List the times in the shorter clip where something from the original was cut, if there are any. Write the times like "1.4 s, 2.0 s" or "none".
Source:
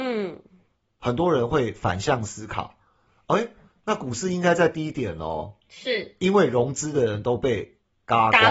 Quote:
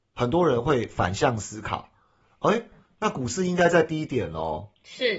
none